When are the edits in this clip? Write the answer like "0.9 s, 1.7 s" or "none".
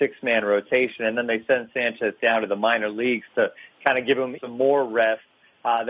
4.4 s